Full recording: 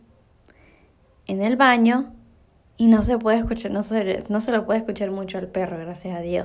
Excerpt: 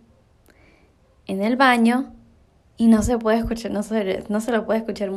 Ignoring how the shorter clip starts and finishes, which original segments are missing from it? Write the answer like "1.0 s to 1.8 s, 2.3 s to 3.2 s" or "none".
none